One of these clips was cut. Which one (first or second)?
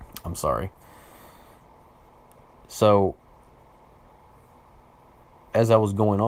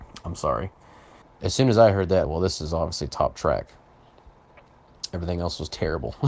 second